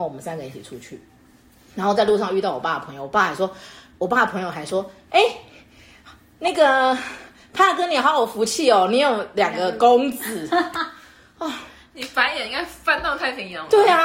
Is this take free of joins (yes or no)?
yes